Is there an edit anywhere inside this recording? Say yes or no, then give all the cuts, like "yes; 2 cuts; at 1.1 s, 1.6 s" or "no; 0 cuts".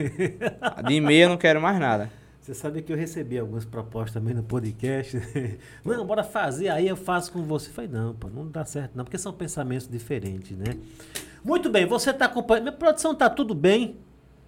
no; 0 cuts